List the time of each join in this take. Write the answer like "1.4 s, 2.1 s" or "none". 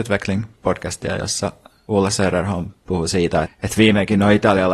1.9 s, 3.4 s